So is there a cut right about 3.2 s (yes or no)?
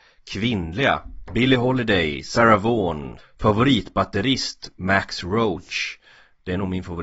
yes